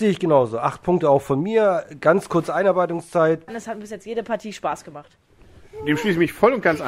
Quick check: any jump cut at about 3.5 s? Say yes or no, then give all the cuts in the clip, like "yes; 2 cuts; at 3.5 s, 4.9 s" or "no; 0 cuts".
yes; 1 cut; at 3.5 s